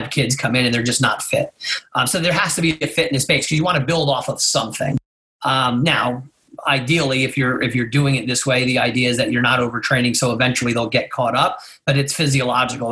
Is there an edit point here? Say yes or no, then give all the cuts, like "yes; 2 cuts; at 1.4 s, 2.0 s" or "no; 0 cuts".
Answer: no; 0 cuts